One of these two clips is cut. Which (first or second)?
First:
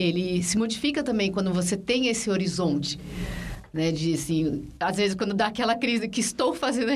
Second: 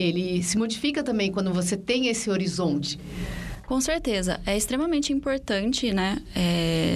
second